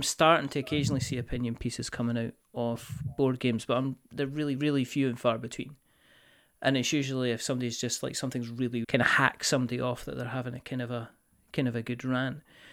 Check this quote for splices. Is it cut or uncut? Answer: cut